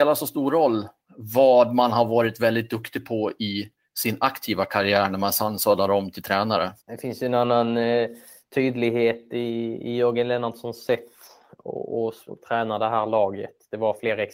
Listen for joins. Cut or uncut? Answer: cut